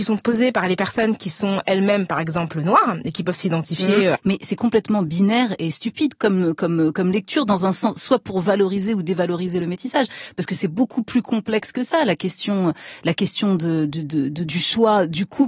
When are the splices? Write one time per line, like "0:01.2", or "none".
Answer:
0:04.2